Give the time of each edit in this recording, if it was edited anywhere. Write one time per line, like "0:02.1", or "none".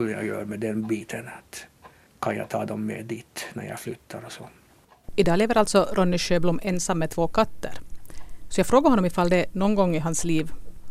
none